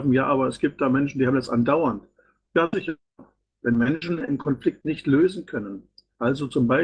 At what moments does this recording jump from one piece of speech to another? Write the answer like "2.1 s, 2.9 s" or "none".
none